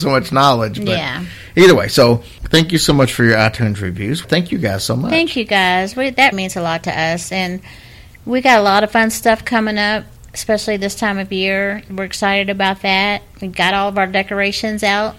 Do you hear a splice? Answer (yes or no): yes